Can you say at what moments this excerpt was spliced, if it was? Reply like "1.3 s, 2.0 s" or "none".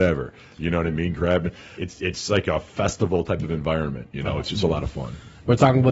1.8 s